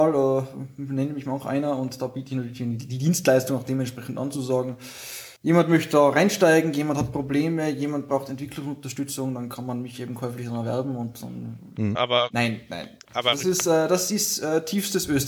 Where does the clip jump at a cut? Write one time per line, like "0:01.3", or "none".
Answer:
0:05.4
0:12.0

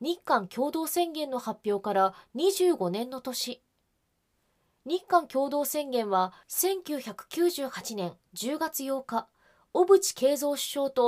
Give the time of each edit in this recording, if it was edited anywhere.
none

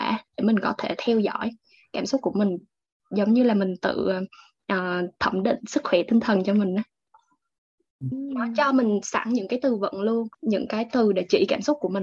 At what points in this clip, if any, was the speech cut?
0:08.1
0:10.3

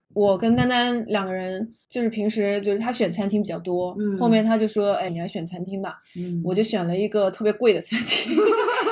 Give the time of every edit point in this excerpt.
0:05.1

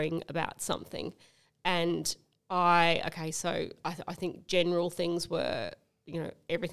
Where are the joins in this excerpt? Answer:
none

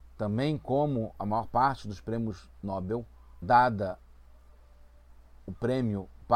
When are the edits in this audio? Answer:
0:03.4

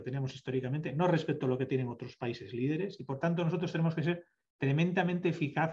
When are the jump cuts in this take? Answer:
none

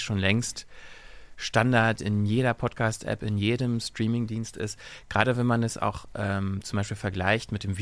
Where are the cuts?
none

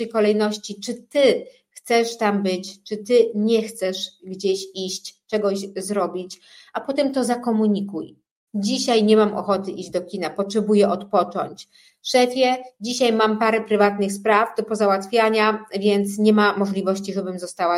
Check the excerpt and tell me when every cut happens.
0:08.5

